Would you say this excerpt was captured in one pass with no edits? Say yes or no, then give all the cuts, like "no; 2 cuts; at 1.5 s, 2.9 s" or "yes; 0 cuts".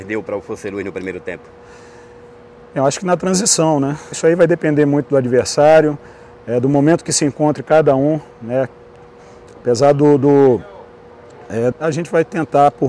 no; 2 cuts; at 4.1 s, 11.7 s